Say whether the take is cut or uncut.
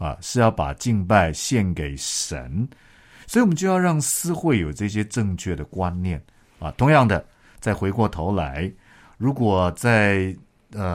uncut